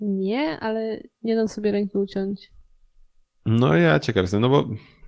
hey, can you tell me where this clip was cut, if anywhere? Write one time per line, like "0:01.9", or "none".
none